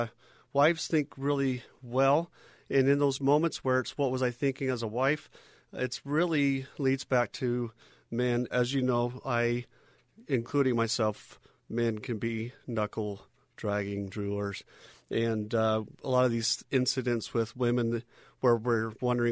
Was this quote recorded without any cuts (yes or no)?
no